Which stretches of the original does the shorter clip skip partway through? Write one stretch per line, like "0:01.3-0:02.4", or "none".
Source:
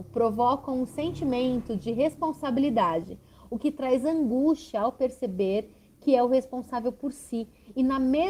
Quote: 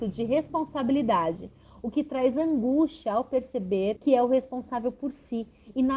0:05.6-0:06.0